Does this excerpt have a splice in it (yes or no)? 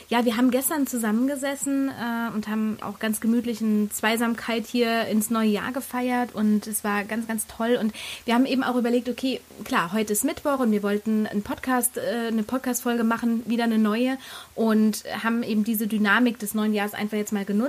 yes